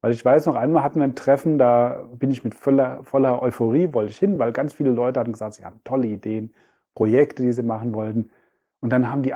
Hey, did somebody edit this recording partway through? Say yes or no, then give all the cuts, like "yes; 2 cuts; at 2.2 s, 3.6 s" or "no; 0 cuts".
no; 0 cuts